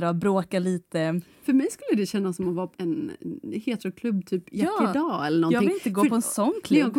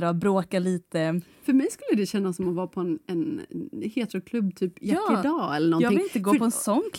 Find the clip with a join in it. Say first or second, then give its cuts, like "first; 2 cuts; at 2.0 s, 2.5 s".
first; 1 cut; at 2.7 s